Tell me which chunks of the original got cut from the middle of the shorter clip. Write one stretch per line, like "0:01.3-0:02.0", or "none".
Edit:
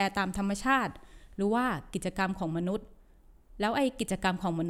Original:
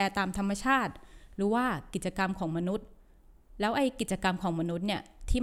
none